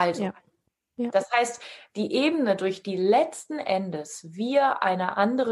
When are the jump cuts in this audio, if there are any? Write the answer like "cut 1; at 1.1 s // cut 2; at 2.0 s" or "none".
none